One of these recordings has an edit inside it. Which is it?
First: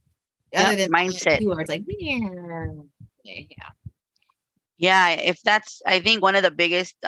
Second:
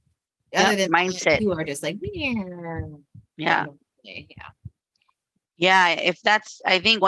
first; 2 cuts; at 1.7 s, 3.1 s

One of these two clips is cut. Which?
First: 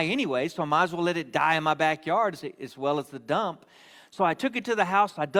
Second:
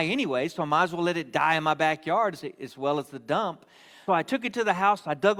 second; 1 cut; at 4.1 s

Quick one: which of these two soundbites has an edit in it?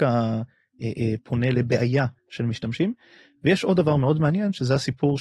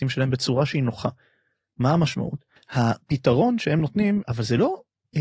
second; 2 cuts; at 2.6 s, 4.2 s

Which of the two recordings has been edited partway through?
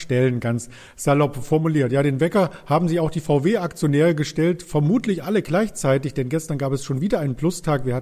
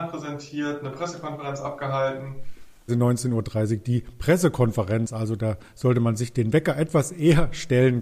second; 1 cut; at 2.9 s

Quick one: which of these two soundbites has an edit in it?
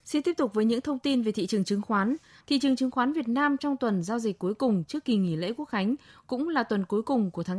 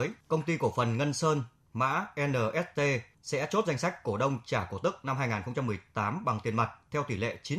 first; 1 cut; at 2.4 s

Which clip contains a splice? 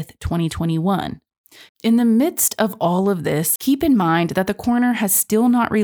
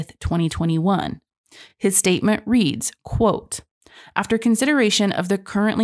first; 2 cuts; at 1.7 s, 3.6 s

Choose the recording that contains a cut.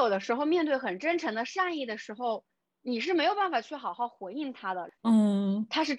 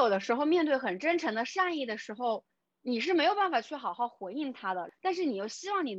first; 1 cut; at 5.0 s

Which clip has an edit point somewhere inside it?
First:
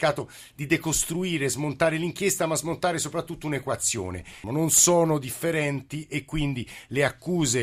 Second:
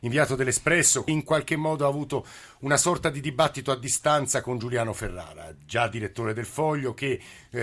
first; 1 cut; at 4.4 s

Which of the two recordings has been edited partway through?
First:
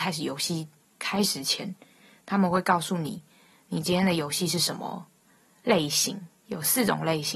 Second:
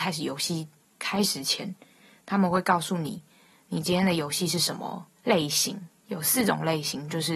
second; 1 cut; at 5.2 s

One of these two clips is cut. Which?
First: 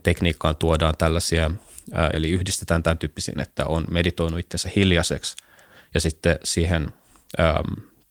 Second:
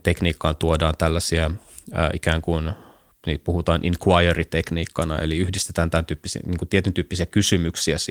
first; 2 cuts; at 2.1 s, 3.3 s

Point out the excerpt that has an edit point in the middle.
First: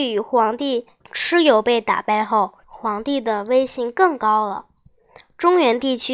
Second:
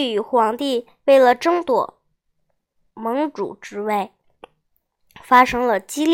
first; 2 cuts; at 1.0 s, 2.6 s

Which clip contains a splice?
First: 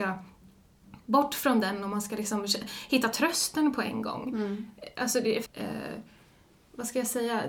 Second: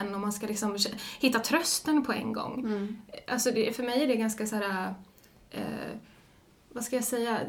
first; 1 cut; at 5.5 s

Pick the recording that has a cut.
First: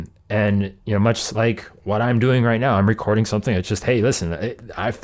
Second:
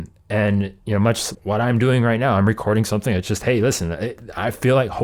second; 1 cut; at 1.3 s

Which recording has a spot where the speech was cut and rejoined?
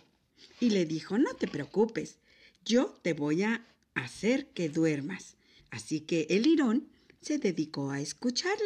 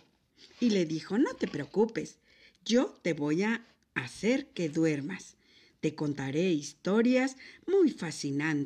first; 1 cut; at 5.6 s

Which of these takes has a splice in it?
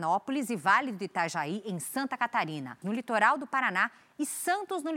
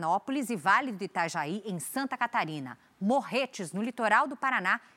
first; 1 cut; at 2.8 s

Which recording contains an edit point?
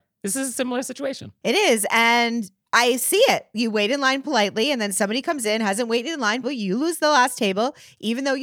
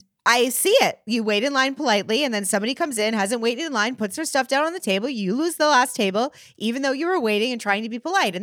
first; 1 cut; at 6.4 s

